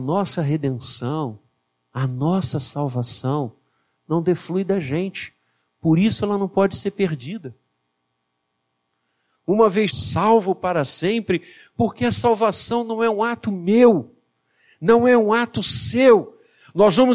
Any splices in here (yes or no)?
yes